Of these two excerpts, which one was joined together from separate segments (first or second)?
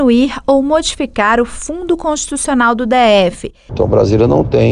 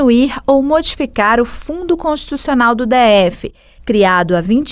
first